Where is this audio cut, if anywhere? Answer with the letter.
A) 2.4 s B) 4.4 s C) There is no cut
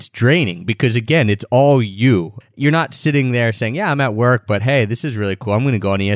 A